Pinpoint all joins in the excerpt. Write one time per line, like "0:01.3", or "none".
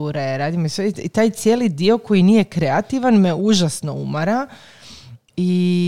none